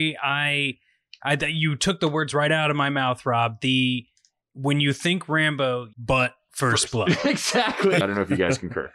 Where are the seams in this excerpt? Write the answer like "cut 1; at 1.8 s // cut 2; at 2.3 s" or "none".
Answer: cut 1; at 5.9 s // cut 2; at 8.0 s